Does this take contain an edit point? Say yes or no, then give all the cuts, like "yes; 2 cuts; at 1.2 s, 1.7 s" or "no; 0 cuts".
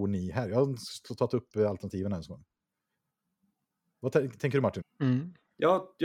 yes; 1 cut; at 4.8 s